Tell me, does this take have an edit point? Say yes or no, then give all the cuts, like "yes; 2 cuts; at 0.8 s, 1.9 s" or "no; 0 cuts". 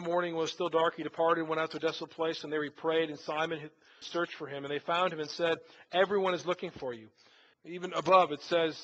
yes; 2 cuts; at 4.0 s, 7.5 s